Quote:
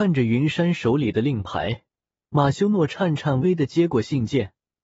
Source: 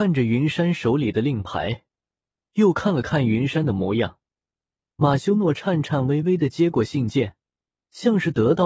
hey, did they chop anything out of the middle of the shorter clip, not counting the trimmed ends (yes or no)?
yes